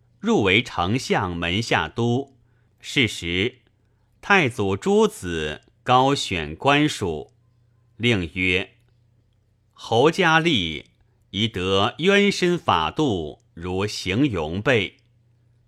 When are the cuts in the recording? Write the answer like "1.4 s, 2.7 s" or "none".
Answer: 2.7 s